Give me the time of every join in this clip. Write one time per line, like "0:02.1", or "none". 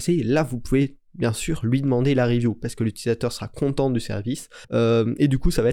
0:04.6